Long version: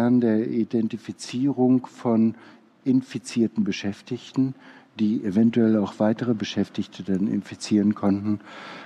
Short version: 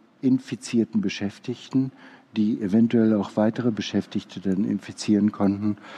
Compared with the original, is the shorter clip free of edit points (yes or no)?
yes